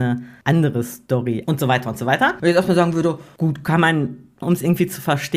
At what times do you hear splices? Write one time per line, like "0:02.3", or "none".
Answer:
0:01.4
0:04.4